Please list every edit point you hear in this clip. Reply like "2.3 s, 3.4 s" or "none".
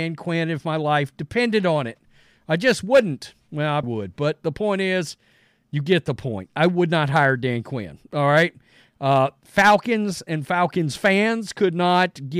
3.8 s